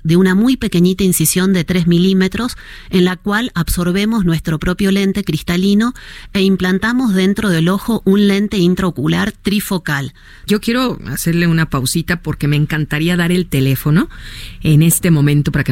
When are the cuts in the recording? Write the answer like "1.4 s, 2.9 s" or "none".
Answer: 10.5 s